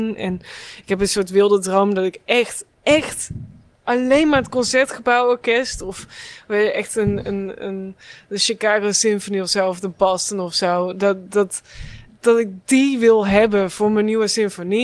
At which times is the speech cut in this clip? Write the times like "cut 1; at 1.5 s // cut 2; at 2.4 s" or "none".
cut 1; at 12.1 s